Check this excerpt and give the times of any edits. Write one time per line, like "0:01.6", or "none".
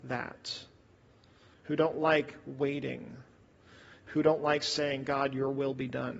0:01.5